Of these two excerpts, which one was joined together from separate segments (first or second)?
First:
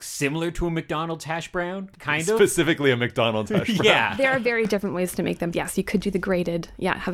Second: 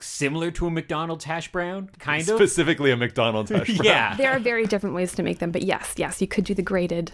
first